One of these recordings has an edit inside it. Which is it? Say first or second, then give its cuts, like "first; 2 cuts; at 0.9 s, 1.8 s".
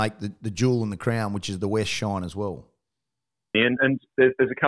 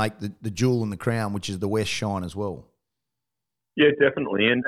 first; 1 cut; at 3.5 s